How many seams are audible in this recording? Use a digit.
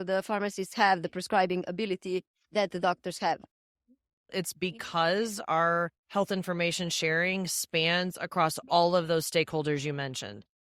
2